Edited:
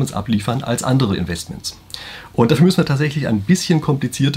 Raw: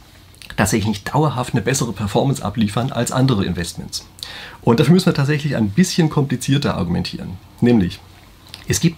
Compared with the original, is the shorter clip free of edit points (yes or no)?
yes